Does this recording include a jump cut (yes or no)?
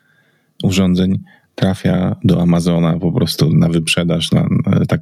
yes